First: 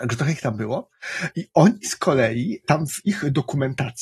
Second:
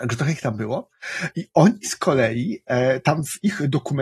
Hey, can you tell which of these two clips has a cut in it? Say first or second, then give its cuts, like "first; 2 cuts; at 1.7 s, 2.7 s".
first; 1 cut; at 2.6 s